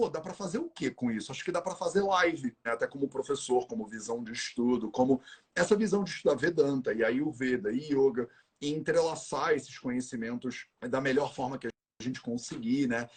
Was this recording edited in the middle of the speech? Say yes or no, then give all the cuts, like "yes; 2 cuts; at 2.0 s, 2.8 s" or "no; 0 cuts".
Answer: yes; 2 cuts; at 2.6 s, 10.8 s